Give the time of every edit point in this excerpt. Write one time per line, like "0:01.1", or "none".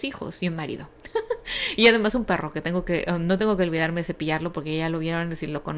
none